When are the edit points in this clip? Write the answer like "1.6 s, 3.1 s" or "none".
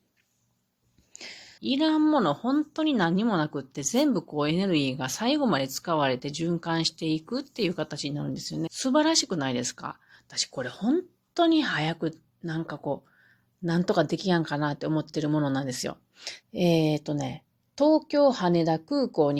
1.6 s, 8.7 s, 16.4 s